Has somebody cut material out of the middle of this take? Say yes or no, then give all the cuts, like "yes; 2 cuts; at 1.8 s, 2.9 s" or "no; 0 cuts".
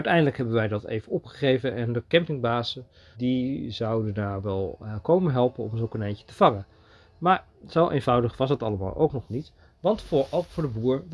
yes; 1 cut; at 3.1 s